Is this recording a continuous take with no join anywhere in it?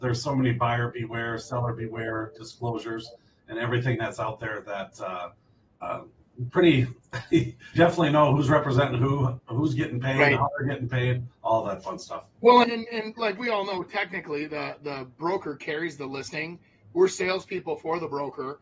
no; 3 cuts; at 5.8 s, 7.8 s, 12.6 s

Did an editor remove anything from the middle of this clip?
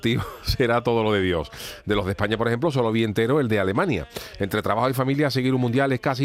no; 0 cuts

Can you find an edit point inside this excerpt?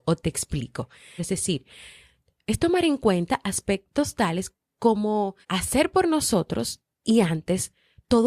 yes; 2 cuts; at 1.2 s, 5.4 s

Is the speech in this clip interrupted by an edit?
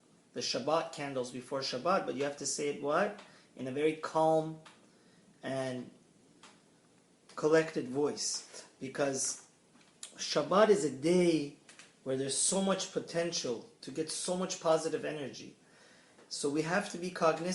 no; 0 cuts

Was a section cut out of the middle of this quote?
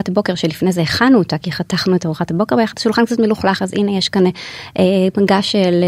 no; 0 cuts

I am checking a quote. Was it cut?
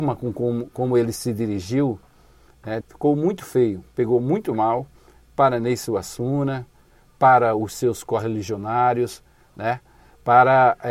yes; 1 cut; at 2.8 s

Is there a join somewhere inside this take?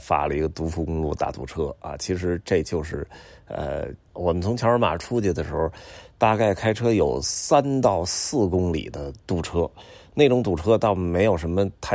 yes; 1 cut; at 4.1 s

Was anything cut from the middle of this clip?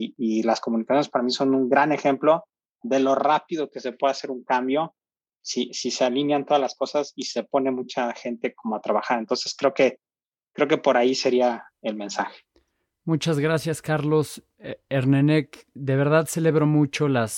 no; 0 cuts

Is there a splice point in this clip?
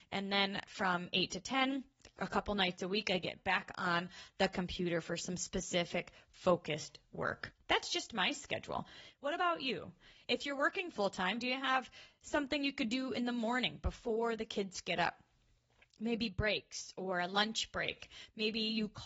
no; 0 cuts

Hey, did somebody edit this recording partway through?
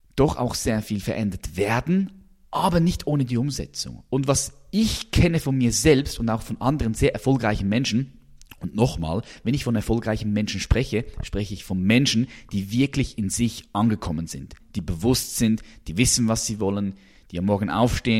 yes; 1 cut; at 14.6 s

